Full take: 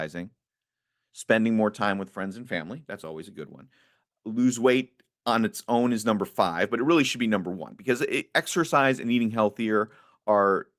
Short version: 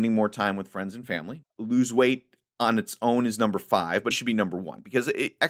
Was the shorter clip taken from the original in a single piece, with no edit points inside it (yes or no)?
no